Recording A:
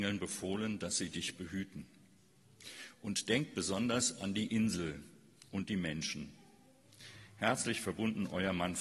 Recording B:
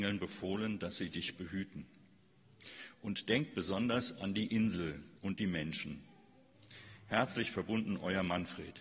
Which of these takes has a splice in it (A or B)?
B